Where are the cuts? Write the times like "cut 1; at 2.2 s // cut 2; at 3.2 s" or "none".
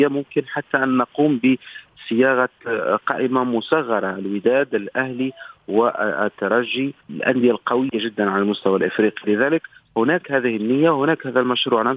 cut 1; at 7.0 s